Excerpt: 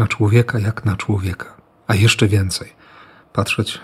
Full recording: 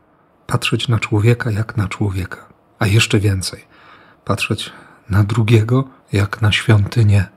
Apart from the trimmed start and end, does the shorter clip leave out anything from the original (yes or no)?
no